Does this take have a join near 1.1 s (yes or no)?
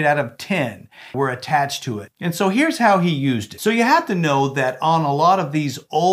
yes